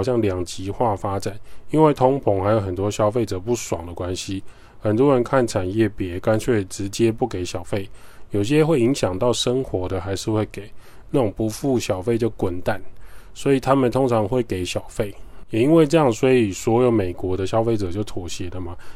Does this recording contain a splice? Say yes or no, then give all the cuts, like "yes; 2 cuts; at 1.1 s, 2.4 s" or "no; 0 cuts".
yes; 2 cuts; at 11.0 s, 15.4 s